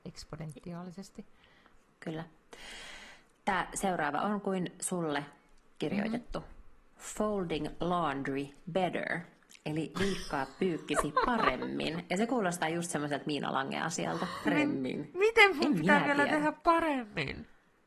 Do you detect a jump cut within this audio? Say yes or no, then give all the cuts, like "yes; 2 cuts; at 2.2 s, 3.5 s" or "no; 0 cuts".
yes; 1 cut; at 14.5 s